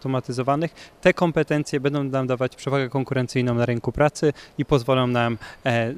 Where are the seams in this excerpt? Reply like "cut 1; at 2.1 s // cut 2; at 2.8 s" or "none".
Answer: none